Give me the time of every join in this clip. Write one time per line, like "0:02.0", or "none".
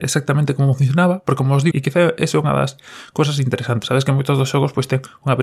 0:01.7
0:03.8